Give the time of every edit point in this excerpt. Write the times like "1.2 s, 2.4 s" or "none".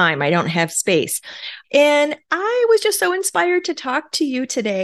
1.6 s